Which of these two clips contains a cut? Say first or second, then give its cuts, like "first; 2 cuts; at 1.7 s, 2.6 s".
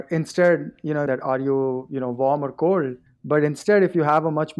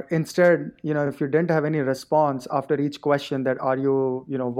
first; 2 cuts; at 1.1 s, 3.1 s